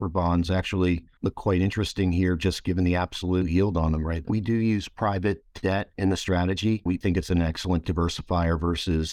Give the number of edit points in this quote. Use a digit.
2